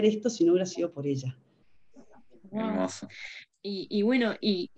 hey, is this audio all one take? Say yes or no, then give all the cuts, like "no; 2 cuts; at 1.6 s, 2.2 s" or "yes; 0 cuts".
no; 1 cut; at 3.5 s